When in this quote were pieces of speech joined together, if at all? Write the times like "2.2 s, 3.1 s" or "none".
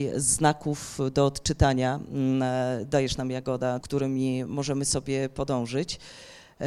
3.8 s